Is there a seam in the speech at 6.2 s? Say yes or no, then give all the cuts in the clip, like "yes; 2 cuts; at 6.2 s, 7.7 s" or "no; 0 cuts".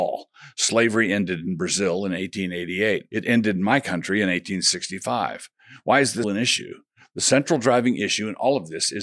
yes; 1 cut; at 6.2 s